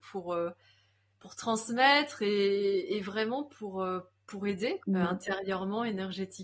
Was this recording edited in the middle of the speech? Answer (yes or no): yes